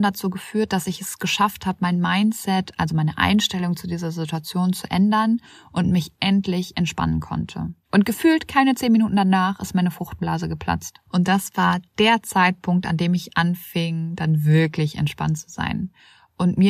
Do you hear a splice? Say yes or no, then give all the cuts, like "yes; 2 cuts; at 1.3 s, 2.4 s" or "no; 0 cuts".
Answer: yes; 2 cuts; at 7.8 s, 11.1 s